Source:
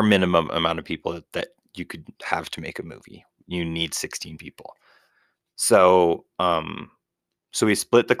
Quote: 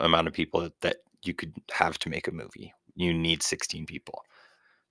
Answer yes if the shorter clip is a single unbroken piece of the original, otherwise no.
yes